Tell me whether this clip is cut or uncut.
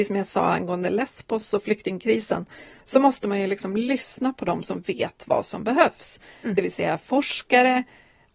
uncut